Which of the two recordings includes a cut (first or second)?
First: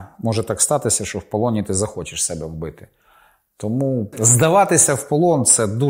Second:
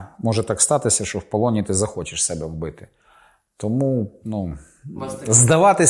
first